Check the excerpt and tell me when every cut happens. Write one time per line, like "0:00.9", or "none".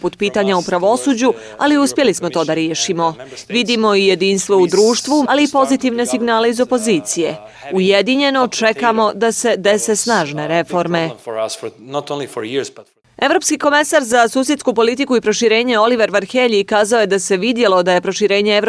0:05.3